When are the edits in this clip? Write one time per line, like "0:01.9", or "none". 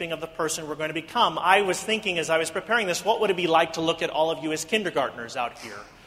none